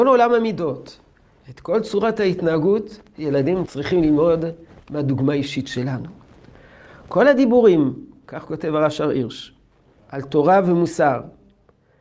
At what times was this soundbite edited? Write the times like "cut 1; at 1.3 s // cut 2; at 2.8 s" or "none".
cut 1; at 3.7 s